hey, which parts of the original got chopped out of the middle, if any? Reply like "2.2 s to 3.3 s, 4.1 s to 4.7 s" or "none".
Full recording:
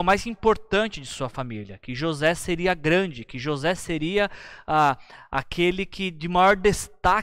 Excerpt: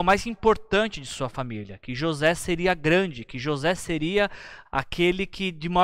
4.7 s to 5.2 s